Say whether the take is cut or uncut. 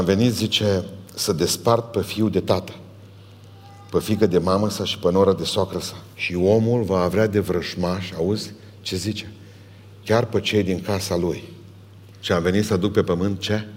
cut